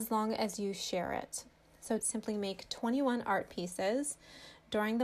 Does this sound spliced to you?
yes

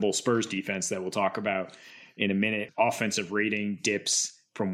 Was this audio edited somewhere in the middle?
yes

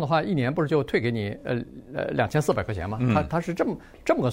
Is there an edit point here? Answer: no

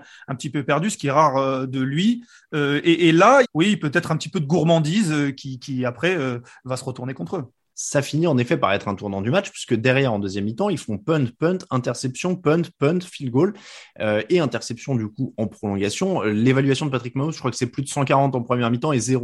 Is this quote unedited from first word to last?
no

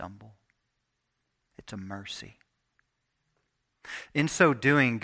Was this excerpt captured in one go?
yes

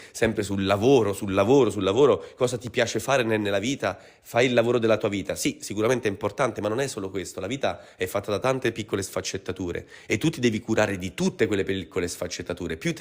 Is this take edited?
no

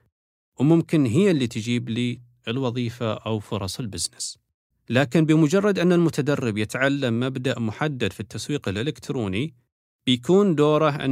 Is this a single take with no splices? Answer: no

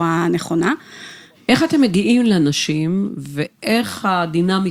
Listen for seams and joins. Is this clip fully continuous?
no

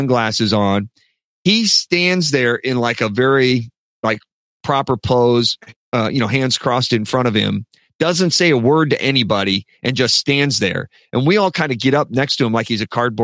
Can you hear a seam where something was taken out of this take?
yes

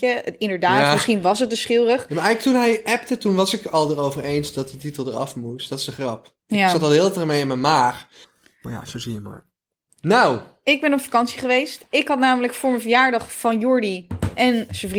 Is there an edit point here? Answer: no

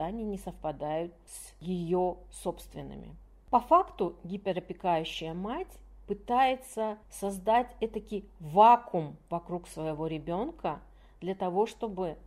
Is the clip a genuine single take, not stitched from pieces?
no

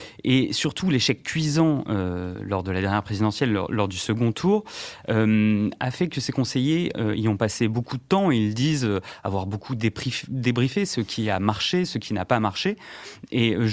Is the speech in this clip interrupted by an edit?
no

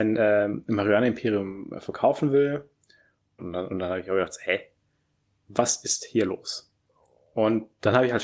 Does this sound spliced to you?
yes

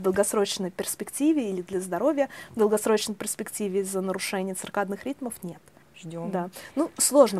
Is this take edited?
yes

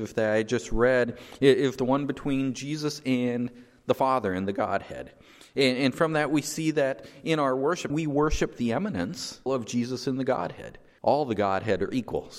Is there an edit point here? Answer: yes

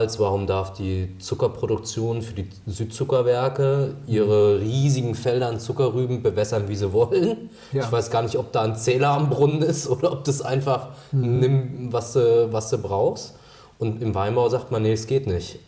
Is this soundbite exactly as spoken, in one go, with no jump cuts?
yes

